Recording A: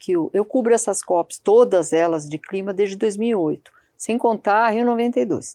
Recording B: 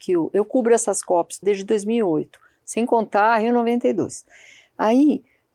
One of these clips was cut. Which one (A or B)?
B